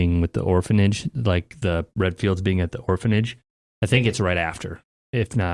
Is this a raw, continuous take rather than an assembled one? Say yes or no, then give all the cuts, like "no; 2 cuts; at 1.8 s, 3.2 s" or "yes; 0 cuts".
yes; 0 cuts